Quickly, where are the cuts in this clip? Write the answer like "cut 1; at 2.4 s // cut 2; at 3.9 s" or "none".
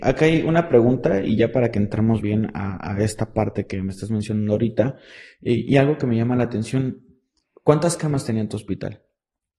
cut 1; at 2.2 s